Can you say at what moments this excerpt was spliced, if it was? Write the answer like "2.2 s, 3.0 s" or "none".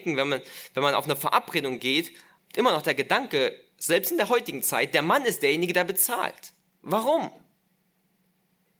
2.4 s